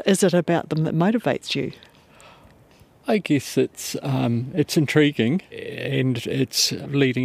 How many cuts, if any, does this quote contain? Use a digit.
0